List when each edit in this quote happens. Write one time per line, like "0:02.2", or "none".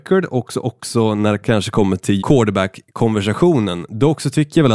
0:02.2